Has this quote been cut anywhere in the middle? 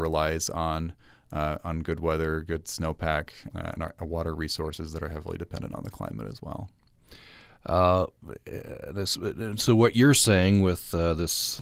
yes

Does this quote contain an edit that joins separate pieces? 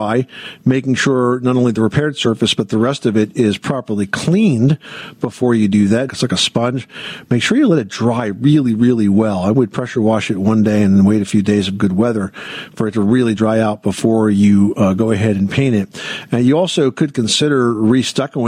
yes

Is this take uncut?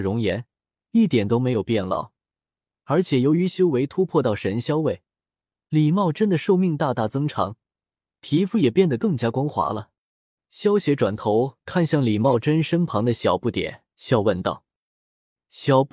no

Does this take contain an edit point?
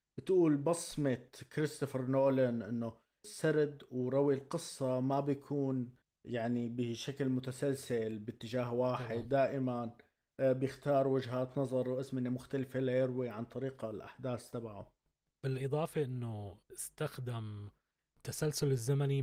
no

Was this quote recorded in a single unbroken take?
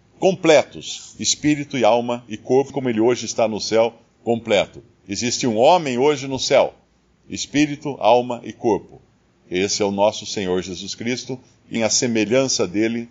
no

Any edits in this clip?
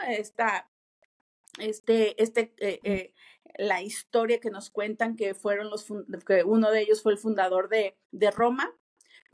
yes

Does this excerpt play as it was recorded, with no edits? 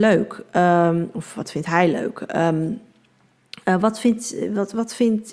yes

